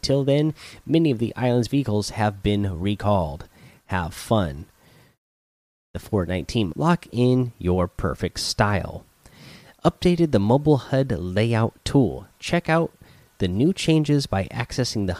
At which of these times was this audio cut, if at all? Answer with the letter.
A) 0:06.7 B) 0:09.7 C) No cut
A